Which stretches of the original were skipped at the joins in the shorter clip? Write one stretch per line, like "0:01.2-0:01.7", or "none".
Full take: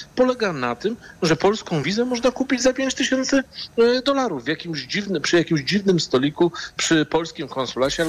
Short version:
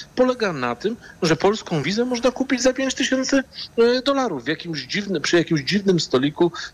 none